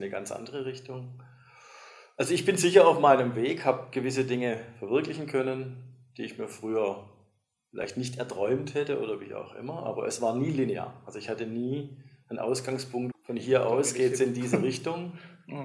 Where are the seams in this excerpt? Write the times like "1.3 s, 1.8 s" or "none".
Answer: 13.1 s